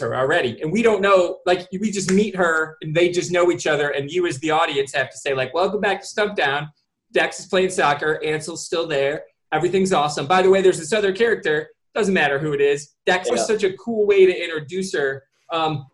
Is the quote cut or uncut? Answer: cut